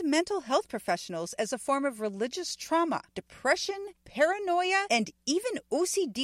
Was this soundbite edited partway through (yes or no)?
yes